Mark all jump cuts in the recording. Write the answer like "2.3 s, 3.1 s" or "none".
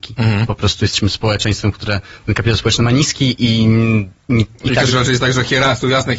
4.2 s